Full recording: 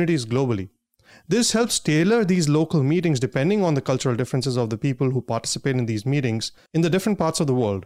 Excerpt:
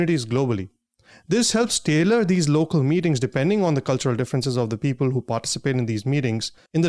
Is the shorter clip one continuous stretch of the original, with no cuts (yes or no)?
yes